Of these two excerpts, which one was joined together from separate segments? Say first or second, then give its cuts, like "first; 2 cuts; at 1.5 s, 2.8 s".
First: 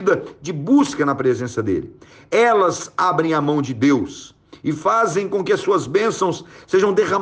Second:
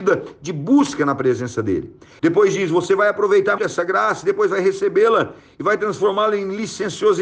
second; 2 cuts; at 2.2 s, 3.6 s